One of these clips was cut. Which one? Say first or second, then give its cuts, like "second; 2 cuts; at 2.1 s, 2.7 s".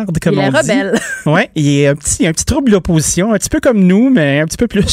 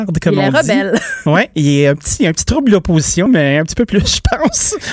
second; 1 cut; at 3.3 s